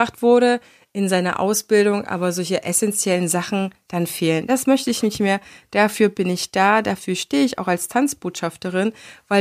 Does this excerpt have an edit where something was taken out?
no; 0 cuts

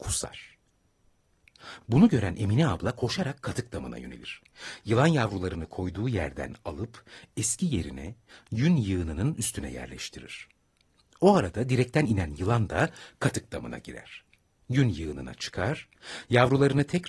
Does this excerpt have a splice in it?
no; 0 cuts

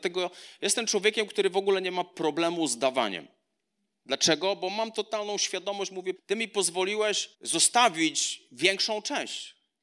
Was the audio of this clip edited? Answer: yes; 2 cuts; at 6.2 s, 7.3 s

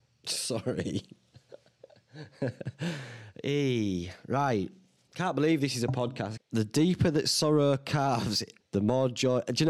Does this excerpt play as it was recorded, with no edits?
no; 2 cuts; at 6.4 s, 8.6 s

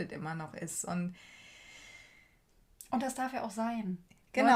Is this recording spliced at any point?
no; 0 cuts

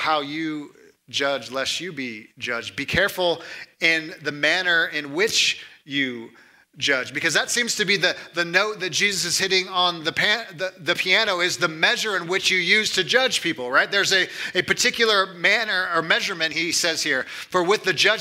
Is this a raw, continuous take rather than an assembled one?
yes; 0 cuts

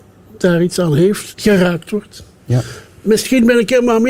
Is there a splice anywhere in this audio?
yes; 1 cut; at 1.3 s

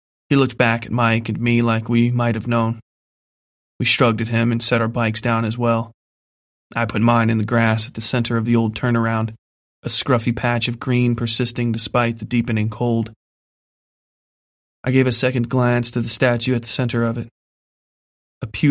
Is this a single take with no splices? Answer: yes; 0 cuts

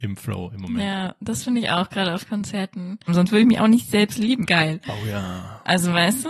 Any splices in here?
yes; 2 cuts; at 3.1 s, 4.4 s

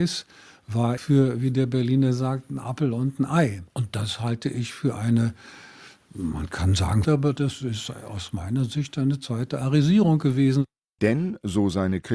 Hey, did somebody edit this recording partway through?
yes; 2 cuts; at 1.0 s, 7.0 s

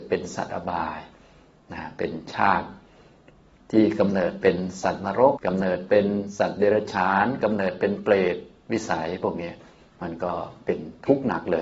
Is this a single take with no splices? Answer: no; 1 cut; at 5.4 s

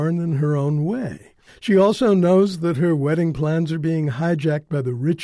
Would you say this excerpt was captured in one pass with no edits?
no; 1 cut; at 1.5 s

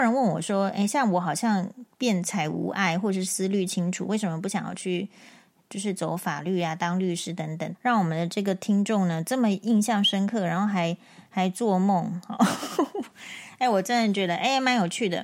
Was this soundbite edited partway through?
yes; 1 cut; at 7.7 s

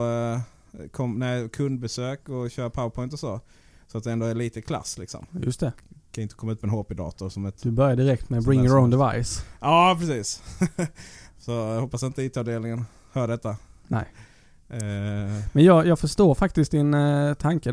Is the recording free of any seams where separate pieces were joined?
yes; 0 cuts

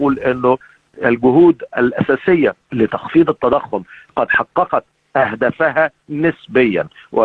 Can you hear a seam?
yes; 1 cut; at 2.6 s

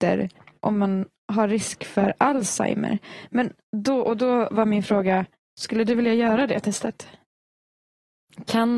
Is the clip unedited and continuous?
yes; 0 cuts

